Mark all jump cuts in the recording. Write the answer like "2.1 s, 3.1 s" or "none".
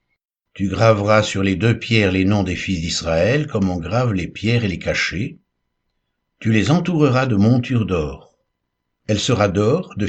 8.9 s